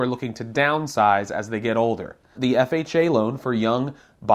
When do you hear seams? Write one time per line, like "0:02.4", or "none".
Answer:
0:02.3